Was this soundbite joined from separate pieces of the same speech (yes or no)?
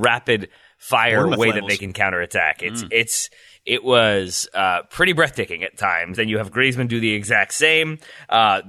yes